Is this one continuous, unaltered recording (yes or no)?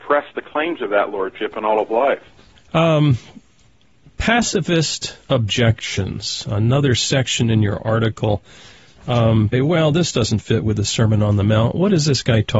no